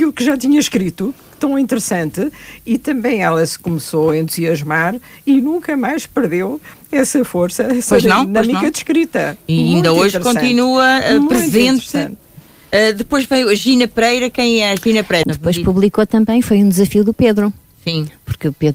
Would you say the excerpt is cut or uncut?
cut